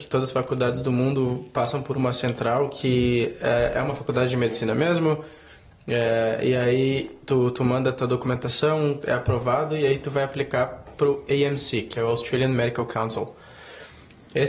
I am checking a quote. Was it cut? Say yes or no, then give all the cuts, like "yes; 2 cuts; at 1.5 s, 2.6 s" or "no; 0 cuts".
no; 0 cuts